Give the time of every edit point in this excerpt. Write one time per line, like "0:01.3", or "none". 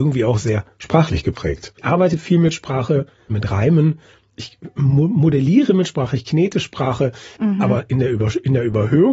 0:03.3
0:07.4